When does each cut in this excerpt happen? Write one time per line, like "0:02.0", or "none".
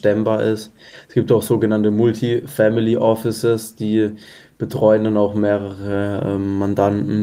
none